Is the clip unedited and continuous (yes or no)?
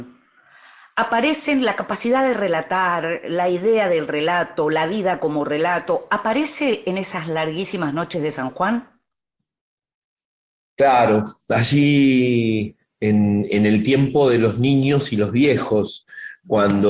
yes